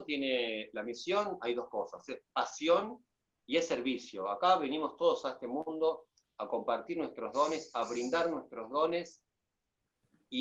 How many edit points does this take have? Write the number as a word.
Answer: zero